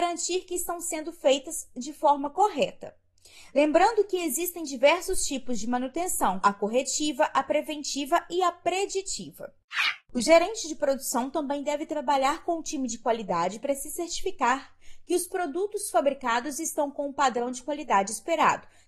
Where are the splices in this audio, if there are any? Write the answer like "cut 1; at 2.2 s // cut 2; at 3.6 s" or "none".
cut 1; at 6.4 s